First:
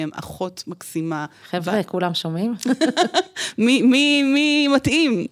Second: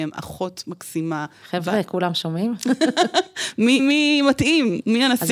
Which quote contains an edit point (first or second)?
second